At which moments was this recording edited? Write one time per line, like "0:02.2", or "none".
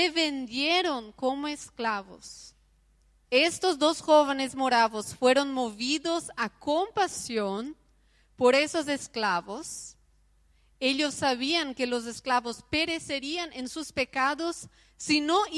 0:03.2